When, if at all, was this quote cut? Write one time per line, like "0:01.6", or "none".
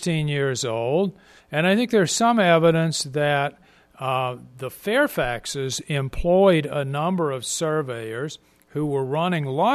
0:01.4